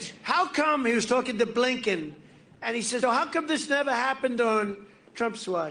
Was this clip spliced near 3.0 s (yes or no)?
yes